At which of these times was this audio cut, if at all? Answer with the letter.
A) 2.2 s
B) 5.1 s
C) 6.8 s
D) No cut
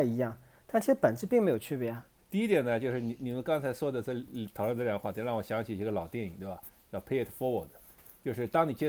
A